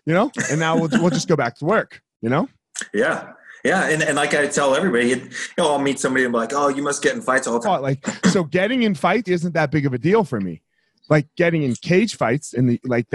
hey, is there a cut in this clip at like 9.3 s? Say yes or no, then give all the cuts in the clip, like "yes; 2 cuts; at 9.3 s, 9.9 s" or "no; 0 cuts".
yes; 2 cuts; at 7.6 s, 9.3 s